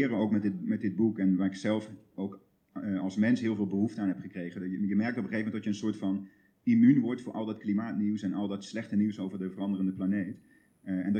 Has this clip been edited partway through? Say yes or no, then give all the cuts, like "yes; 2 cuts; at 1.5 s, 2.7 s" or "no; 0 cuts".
no; 0 cuts